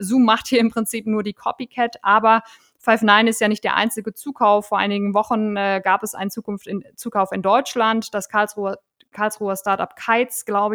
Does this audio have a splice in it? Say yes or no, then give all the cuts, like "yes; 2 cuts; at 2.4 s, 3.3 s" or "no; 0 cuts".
no; 0 cuts